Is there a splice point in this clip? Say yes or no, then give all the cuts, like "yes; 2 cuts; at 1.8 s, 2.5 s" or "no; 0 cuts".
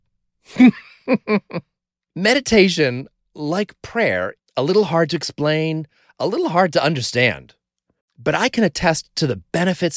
yes; 1 cut; at 4.4 s